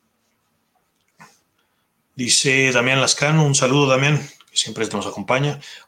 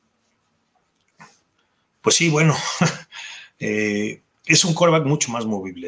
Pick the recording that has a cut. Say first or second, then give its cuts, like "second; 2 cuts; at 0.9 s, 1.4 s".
second; 1 cut; at 1.9 s